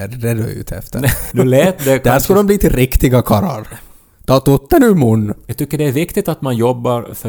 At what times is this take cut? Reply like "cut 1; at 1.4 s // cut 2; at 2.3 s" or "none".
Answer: cut 1; at 1.3 s